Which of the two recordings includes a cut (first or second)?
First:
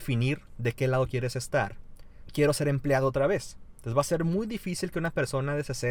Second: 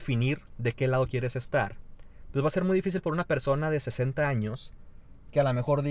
first